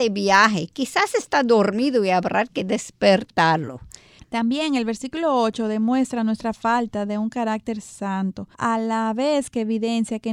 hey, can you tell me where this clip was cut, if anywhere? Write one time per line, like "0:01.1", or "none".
0:04.2
0:08.5